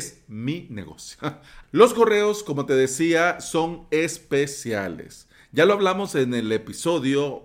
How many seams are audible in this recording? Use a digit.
1